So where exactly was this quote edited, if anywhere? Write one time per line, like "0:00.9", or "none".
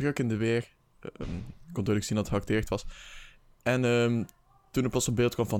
none

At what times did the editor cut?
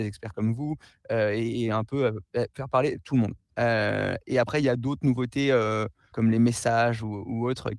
0:03.5
0:06.1

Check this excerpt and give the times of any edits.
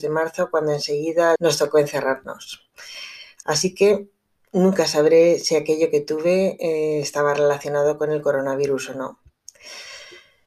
0:01.4
0:03.4

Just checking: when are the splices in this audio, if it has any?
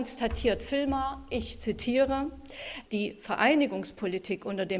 0:02.8

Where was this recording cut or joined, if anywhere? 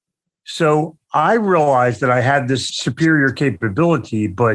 none

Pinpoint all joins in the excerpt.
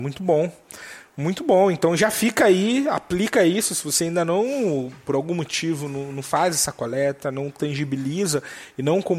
none

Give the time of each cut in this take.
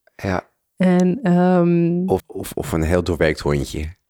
0:02.2

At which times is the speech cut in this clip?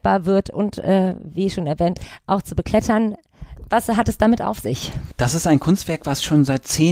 none

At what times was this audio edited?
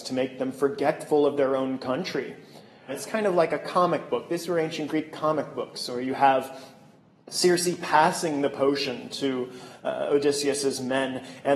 0:02.9

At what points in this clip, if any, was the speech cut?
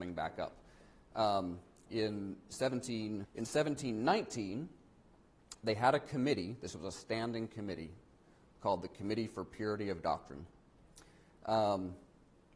0:03.2

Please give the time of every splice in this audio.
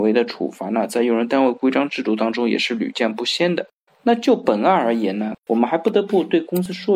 0:03.9
0:05.4

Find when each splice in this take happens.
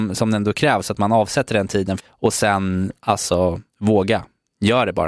0:02.0
0:03.7

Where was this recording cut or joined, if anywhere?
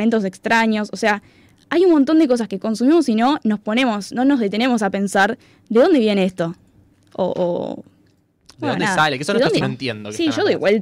0:09.6

